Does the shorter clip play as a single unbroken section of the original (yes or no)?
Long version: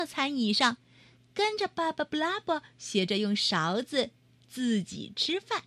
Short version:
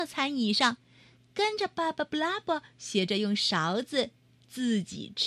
yes